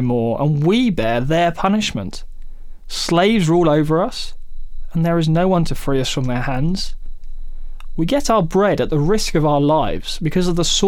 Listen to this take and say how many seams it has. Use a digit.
0